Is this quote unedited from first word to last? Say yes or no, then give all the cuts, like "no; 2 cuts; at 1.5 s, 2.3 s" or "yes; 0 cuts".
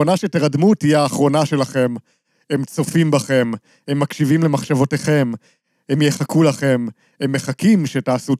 yes; 0 cuts